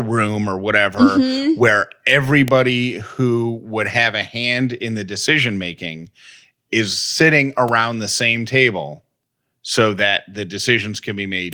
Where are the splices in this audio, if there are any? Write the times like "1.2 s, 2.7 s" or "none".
none